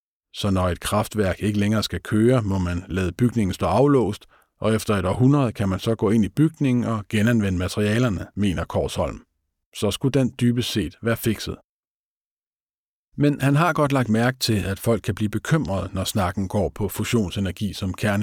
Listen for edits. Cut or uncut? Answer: uncut